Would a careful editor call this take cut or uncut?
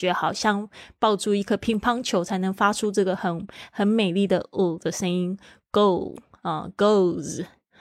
uncut